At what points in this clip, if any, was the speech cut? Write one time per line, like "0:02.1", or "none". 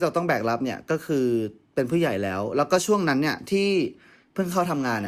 none